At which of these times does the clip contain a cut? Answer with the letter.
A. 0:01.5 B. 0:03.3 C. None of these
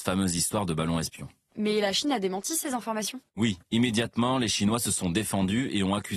B